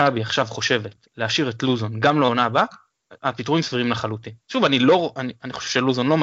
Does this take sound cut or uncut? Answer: uncut